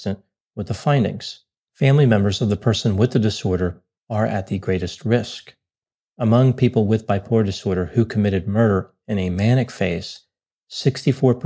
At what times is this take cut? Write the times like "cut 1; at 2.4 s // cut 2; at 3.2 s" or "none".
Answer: cut 1; at 1.6 s